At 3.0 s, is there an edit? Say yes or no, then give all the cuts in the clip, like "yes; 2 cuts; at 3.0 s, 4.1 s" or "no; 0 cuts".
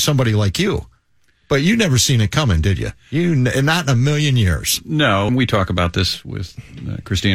no; 1 cut; at 5.3 s